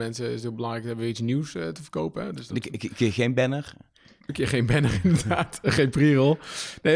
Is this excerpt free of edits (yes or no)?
yes